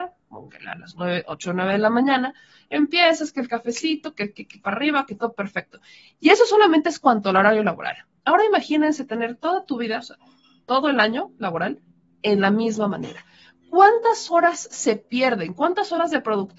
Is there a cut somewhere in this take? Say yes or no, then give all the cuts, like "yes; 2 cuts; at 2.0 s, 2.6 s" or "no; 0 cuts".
no; 0 cuts